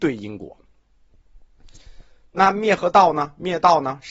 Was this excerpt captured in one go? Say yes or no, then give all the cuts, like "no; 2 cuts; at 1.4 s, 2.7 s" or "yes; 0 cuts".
yes; 0 cuts